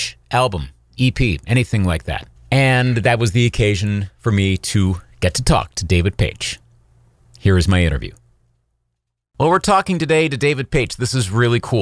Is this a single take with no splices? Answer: no; 1 cut; at 2.4 s

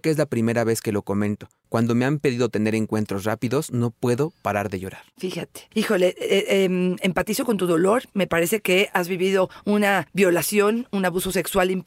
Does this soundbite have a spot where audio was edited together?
no; 0 cuts

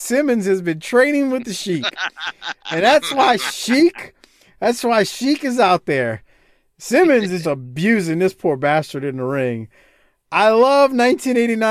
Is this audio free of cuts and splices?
no; 1 cut; at 7.4 s

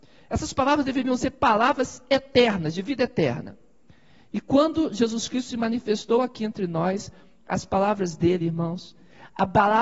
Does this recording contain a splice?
no; 0 cuts

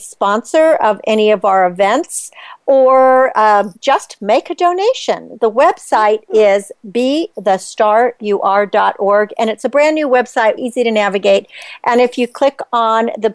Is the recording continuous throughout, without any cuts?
no; 2 cuts; at 3.7 s, 10.6 s

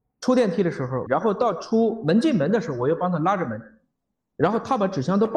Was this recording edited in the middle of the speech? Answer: yes; 1 cut; at 1.1 s

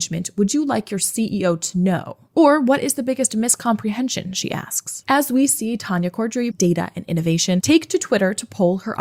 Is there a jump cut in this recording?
yes; 2 cuts; at 5.0 s, 6.5 s

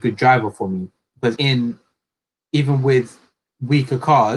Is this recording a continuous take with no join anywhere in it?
no; 1 cut; at 1.4 s

